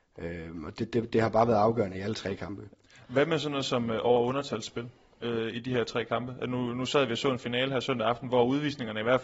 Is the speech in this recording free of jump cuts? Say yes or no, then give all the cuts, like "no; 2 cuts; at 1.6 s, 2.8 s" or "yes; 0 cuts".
no; 1 cut; at 1.1 s